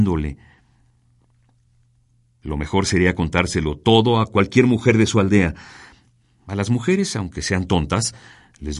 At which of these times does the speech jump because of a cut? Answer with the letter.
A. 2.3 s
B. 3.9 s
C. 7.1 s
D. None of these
D